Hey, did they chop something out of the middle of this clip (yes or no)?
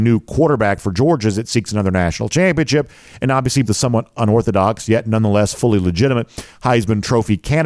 yes